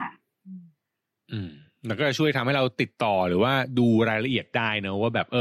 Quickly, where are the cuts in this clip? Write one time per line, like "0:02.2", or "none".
none